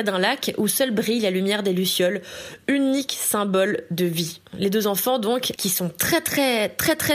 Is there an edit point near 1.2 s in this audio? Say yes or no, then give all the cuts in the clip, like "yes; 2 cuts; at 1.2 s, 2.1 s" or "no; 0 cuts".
no; 2 cuts; at 4.5 s, 5.6 s